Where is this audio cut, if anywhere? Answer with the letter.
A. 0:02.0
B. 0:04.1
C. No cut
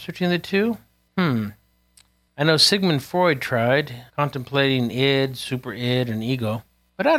B